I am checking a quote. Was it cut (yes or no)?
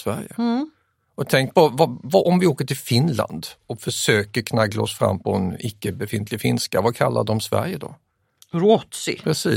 no